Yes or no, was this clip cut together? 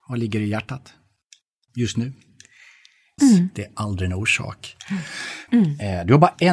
yes